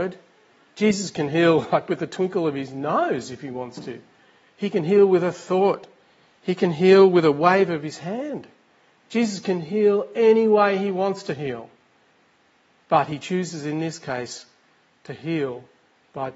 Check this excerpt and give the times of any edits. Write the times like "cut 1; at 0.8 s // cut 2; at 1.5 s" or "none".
none